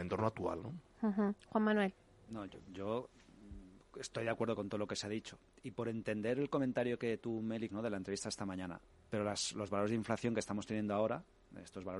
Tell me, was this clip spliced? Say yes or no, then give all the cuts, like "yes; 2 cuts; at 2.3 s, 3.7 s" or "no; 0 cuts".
yes; 2 cuts; at 7.7 s, 8.9 s